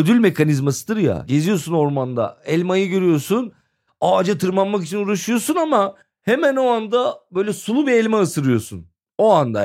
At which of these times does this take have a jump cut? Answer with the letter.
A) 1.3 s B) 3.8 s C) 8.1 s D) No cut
A